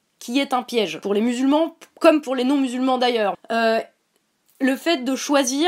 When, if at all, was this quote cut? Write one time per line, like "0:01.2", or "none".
0:03.3